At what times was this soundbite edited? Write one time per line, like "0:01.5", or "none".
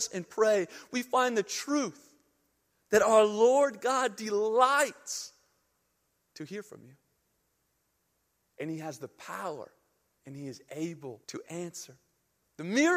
0:10.2
0:11.2

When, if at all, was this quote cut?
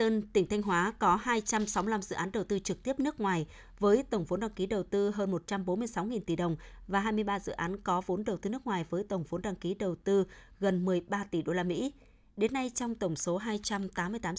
none

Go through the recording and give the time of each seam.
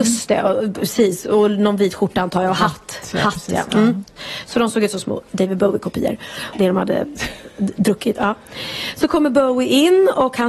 0:06.5

